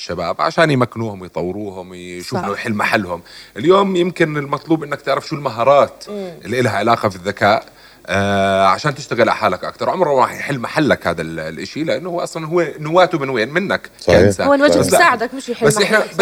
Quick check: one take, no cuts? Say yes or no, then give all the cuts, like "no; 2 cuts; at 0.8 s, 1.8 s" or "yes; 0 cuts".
no; 1 cut; at 2.4 s